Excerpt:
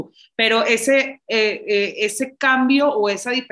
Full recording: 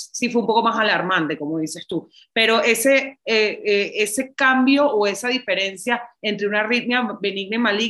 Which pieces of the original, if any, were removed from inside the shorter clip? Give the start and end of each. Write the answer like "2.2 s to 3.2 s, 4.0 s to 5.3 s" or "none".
none